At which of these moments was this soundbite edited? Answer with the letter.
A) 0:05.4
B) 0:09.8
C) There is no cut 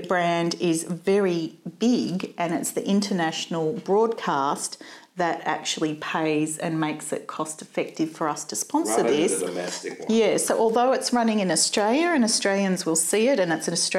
C